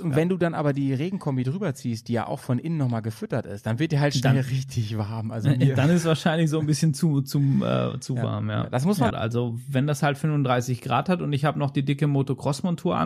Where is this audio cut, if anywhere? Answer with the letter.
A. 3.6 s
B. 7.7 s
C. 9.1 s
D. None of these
C